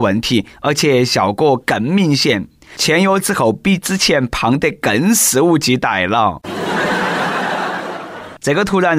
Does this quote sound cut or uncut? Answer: uncut